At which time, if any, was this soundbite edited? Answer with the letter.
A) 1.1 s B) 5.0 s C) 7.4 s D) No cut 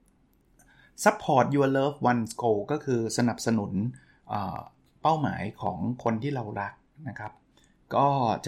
D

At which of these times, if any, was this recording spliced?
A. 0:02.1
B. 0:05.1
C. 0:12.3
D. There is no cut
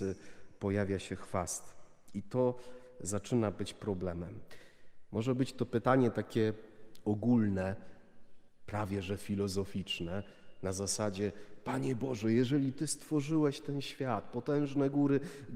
B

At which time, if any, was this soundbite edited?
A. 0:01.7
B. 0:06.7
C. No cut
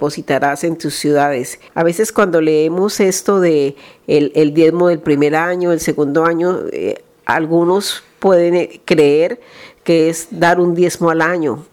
A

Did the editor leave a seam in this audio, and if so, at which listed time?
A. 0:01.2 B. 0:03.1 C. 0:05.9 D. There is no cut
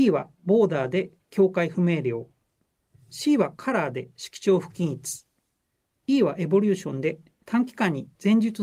C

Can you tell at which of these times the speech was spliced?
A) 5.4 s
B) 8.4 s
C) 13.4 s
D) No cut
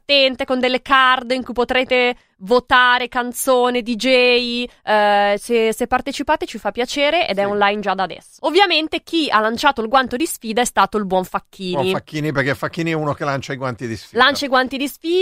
B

